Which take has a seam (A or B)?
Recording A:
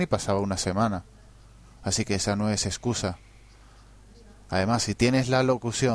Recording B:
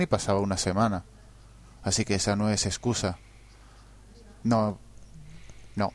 B